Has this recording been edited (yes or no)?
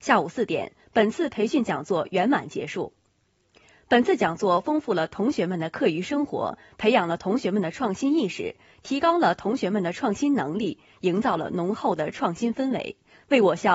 no